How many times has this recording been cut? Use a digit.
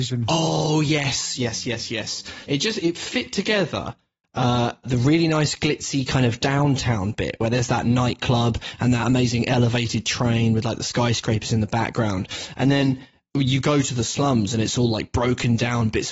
3